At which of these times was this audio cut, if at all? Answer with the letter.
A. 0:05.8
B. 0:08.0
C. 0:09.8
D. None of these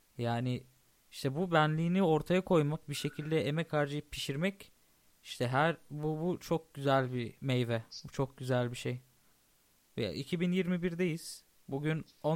C